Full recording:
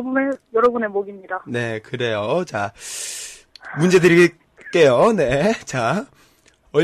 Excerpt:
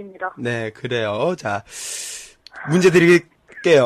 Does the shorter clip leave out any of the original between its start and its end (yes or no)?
no